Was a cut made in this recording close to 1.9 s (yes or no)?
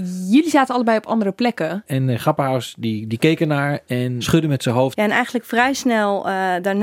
yes